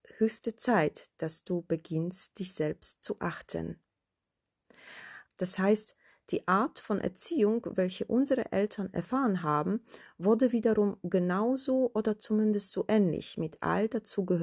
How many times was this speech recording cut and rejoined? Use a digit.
1